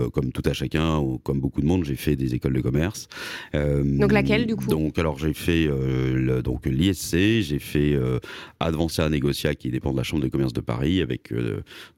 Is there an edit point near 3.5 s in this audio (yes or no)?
no